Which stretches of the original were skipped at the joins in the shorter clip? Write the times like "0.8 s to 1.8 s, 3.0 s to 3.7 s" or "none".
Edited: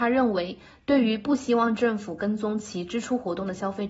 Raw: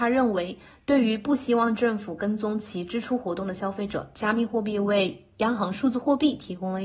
none